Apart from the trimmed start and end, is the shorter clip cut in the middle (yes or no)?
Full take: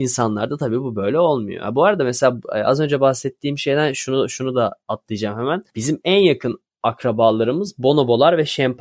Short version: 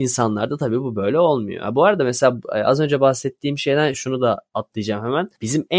yes